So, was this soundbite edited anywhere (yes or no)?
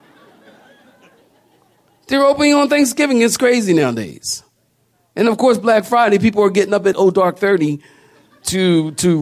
yes